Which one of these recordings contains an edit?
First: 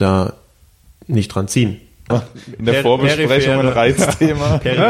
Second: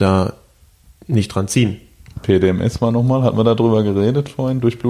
first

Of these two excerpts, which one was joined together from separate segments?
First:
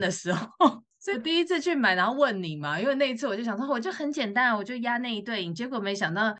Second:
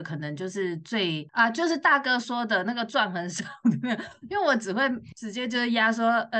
first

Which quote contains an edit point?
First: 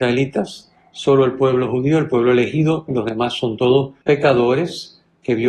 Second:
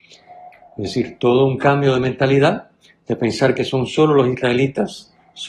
first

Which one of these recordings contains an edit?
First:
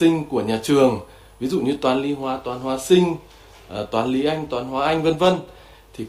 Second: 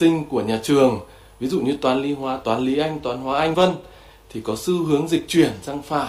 second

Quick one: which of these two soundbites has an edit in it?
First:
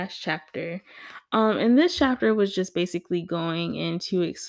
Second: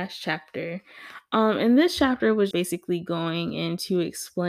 second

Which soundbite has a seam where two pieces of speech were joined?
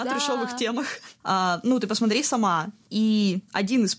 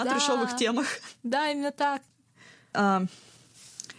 first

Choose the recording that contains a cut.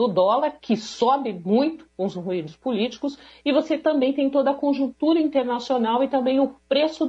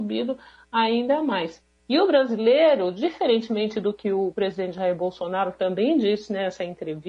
second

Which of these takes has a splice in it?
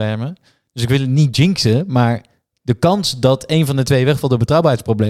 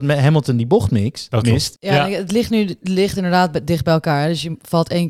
second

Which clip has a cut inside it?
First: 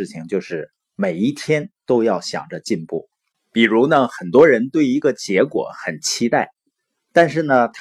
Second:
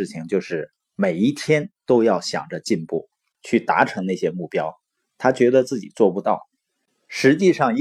second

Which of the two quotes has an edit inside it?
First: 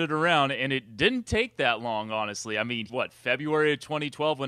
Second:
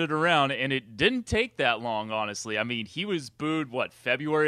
first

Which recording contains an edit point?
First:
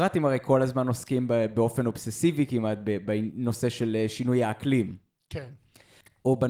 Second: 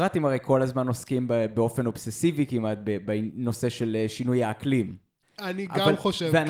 second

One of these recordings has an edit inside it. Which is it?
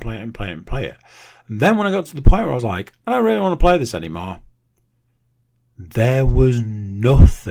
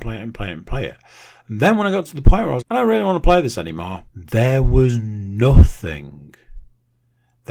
second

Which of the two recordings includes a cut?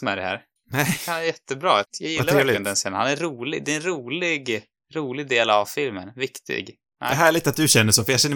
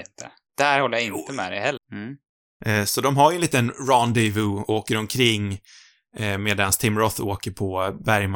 second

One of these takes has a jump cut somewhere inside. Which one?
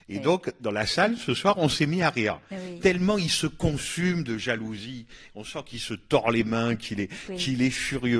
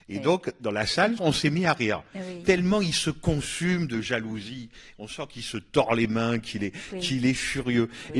second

